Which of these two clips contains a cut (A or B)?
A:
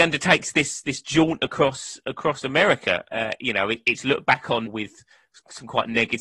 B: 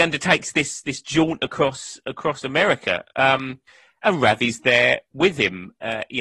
A